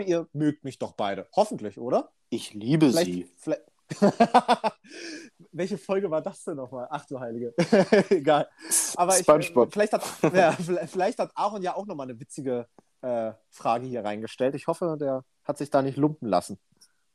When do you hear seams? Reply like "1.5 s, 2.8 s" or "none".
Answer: 2.2 s